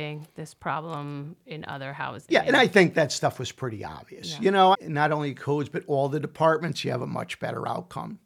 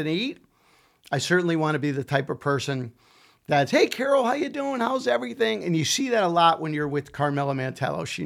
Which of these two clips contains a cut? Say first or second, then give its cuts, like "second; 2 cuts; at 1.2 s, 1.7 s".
first; 2 cuts; at 2.3 s, 4.7 s